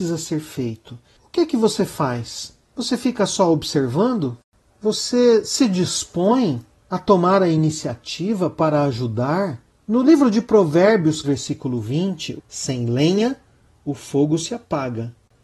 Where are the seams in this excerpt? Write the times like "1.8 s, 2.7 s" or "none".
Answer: 11.2 s, 12.4 s